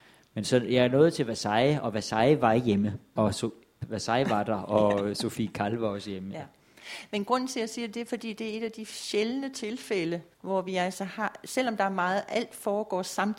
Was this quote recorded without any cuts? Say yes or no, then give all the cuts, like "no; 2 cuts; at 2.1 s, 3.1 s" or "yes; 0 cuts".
no; 2 cuts; at 3.2 s, 10.3 s